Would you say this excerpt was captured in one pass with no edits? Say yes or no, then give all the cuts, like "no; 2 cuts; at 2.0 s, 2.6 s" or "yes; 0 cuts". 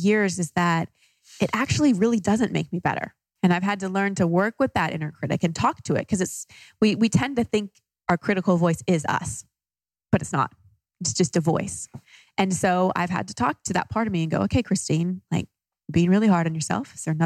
no; 1 cut; at 3.4 s